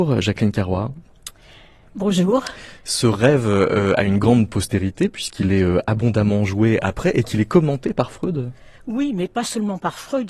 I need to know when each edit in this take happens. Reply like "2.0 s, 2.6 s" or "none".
none

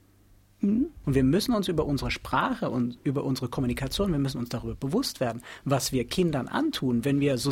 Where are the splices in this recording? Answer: 1.0 s

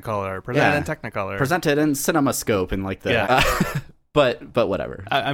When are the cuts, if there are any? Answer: 3.2 s

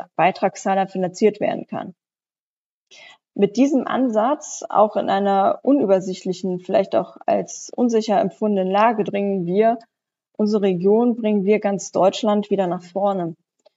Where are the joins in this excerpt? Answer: 9.0 s

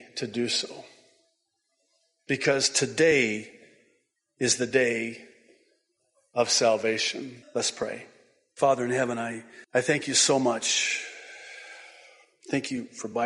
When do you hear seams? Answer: 7.4 s, 9.6 s

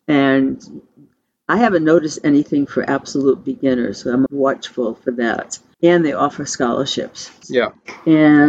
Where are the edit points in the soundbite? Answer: 4.3 s, 5.7 s, 7.4 s

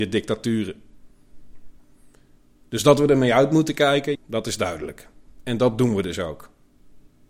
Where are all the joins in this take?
4.2 s

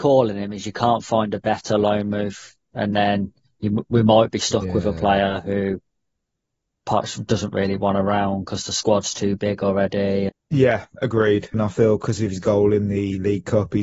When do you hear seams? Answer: 10.3 s, 11.5 s

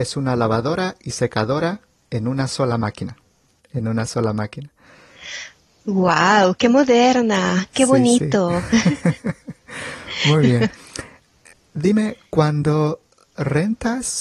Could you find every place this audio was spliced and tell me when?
none

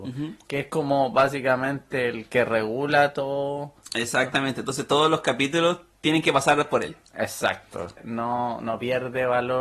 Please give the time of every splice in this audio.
8.0 s

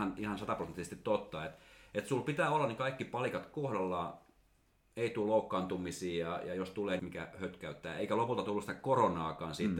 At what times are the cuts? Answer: 7.0 s

